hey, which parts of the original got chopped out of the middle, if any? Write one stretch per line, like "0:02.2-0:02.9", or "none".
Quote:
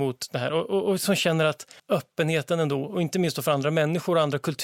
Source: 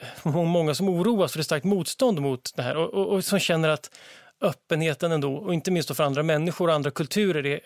0:04.0-0:04.3

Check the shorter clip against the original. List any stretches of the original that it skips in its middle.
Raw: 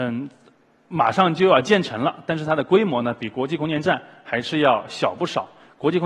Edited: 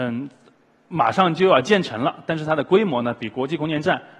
none

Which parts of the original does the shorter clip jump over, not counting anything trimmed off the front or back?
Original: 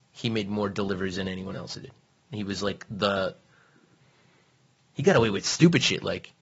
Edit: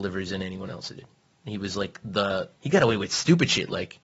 0:03.4-0:04.9

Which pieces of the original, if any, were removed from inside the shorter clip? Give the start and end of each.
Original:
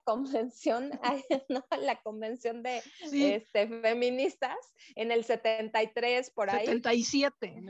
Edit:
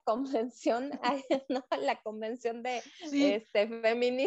none

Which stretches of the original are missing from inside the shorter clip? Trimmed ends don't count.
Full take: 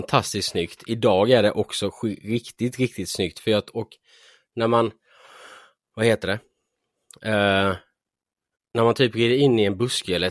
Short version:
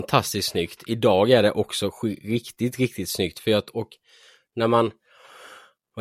none

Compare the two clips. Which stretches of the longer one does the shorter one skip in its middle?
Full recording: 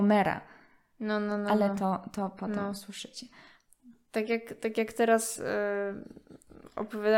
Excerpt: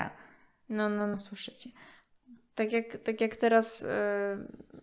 0:01.4-0:02.7

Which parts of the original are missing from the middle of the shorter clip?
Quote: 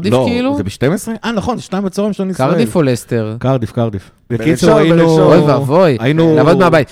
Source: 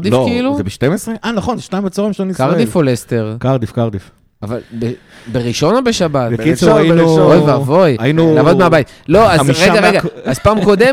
0:04.3-0:06.3

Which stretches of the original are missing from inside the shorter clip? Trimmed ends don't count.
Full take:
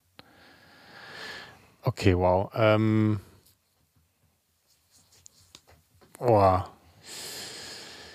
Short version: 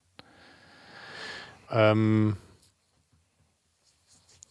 0:01.7-0:02.5

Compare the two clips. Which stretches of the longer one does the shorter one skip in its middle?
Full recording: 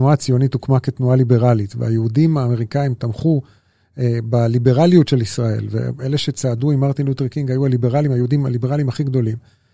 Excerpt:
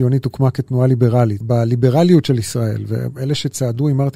0:01.7-0:04.2

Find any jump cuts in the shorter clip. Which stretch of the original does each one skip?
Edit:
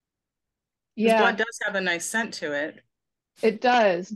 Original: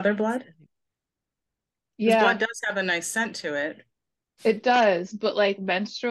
none

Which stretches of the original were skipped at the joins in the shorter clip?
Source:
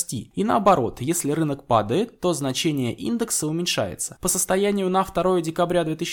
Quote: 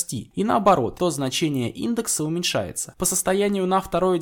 0:01.0-0:02.2

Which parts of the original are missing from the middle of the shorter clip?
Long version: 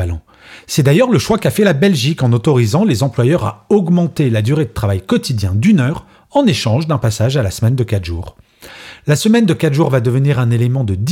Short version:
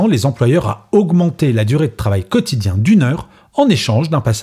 none

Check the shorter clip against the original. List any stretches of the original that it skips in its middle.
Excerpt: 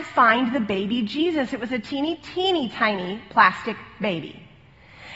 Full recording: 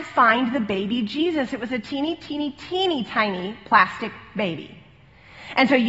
0:02.2-0:02.5

